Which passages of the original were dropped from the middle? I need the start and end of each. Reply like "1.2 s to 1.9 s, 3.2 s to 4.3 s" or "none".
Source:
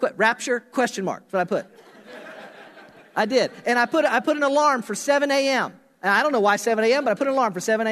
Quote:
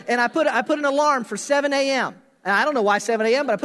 none